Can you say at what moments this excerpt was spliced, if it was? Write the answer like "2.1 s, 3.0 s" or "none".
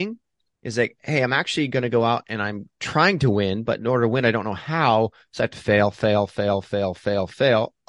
none